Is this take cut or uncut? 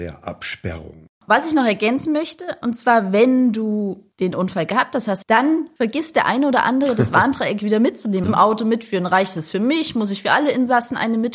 cut